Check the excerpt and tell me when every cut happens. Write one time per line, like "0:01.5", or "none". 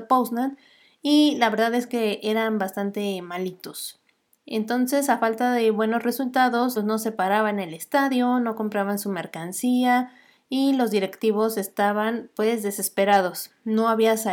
0:06.8